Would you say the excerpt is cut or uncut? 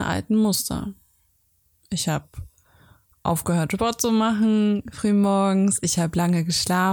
uncut